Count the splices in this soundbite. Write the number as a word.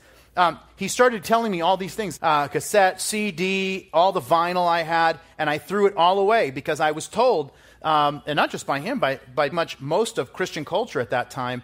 two